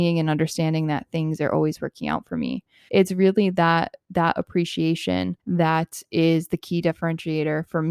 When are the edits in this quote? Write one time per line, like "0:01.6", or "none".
0:02.9
0:05.4